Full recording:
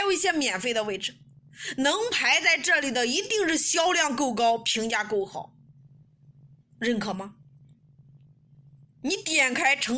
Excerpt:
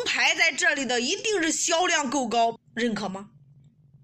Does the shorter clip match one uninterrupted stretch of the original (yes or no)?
no